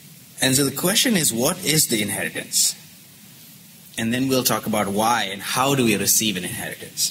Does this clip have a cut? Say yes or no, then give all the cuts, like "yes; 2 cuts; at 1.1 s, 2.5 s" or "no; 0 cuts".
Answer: no; 0 cuts